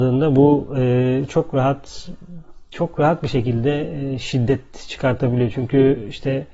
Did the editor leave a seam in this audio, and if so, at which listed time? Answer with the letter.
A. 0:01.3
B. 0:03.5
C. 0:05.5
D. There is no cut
D